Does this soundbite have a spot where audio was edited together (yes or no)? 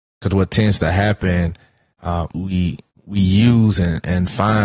yes